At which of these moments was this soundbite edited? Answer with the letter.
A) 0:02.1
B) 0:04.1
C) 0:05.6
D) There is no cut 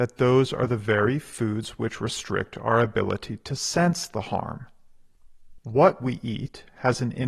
C